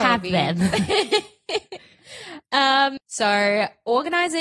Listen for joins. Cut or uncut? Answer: cut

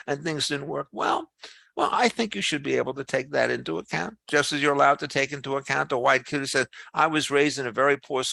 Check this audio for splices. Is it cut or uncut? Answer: uncut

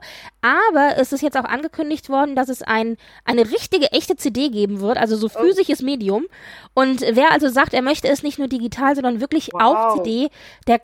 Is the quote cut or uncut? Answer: uncut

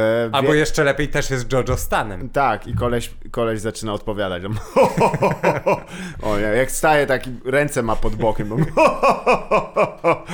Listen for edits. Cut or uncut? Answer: uncut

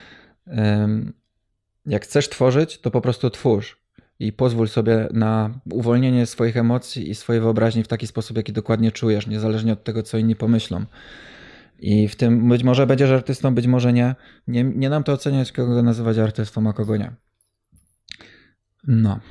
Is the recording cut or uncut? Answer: uncut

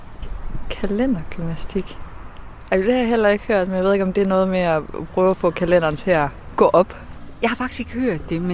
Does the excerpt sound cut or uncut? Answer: uncut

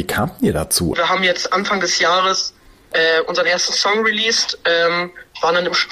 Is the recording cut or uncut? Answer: cut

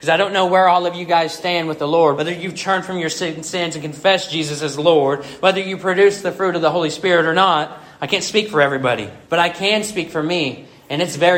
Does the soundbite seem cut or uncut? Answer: cut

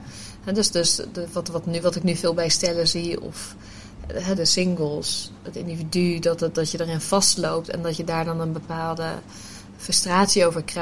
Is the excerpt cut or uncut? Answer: cut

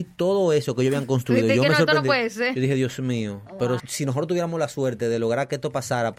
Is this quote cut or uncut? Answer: cut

